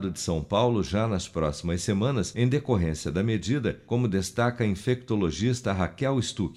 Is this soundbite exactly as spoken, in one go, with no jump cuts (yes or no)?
yes